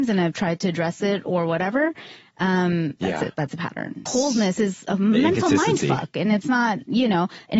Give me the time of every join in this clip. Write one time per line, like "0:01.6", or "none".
0:03.0
0:04.1